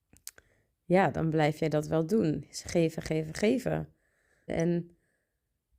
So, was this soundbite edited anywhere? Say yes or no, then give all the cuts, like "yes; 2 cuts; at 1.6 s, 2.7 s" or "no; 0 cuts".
yes; 1 cut; at 4.5 s